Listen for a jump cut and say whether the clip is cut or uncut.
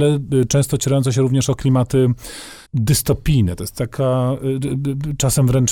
cut